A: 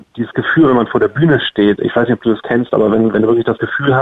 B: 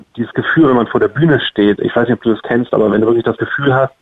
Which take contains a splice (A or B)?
B